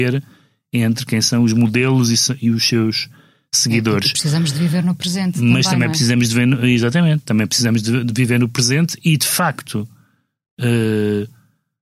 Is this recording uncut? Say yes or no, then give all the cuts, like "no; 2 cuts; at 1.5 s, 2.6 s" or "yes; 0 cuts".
yes; 0 cuts